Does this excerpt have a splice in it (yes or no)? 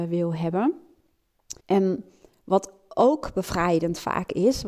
yes